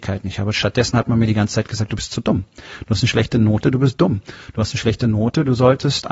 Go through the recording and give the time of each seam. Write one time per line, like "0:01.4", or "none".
none